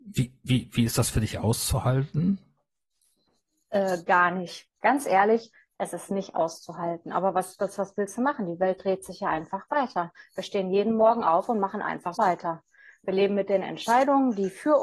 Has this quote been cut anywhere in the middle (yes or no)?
yes